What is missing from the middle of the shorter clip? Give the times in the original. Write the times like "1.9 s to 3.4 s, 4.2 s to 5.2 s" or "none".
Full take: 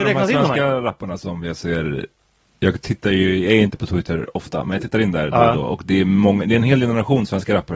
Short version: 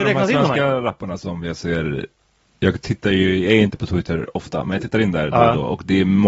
none